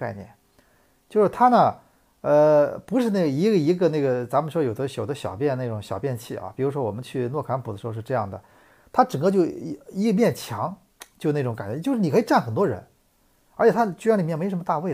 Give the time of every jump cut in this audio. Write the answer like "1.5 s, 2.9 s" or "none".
none